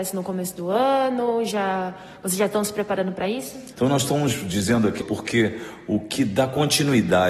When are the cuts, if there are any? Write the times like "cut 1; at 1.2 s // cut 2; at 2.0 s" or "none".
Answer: cut 1; at 3.7 s // cut 2; at 5.0 s